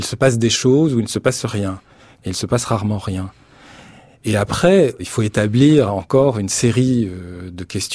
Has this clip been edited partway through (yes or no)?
no